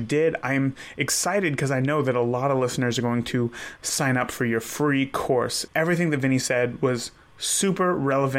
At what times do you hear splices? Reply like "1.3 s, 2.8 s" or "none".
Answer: 5.7 s